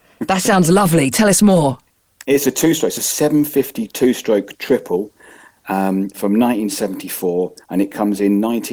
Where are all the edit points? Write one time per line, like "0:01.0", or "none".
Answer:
none